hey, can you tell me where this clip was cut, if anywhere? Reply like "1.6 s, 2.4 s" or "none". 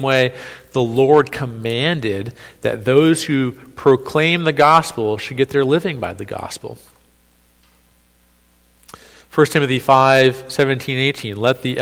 none